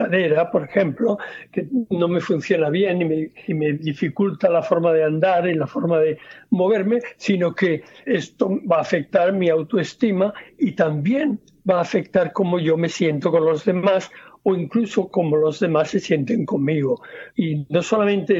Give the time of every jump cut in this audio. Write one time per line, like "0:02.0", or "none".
0:03.5
0:08.1
0:17.3